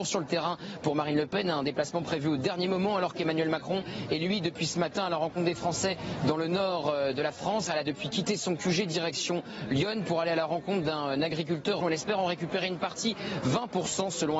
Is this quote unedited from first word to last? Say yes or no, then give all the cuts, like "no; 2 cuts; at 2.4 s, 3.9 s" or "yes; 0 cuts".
no; 2 cuts; at 7.7 s, 11.8 s